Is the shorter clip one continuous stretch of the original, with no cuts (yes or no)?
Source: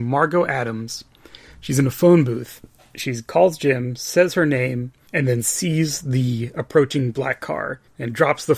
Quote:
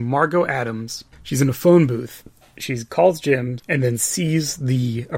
no